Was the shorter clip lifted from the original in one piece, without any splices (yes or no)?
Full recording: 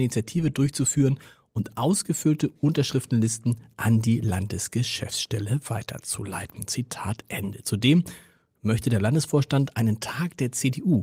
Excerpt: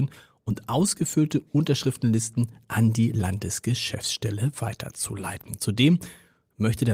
no